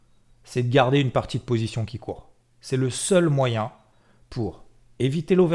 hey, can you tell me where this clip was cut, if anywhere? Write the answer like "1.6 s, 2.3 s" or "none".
none